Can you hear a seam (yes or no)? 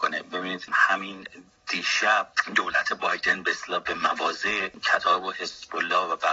no